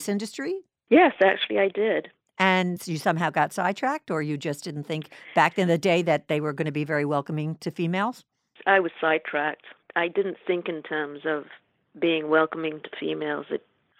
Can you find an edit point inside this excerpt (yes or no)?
no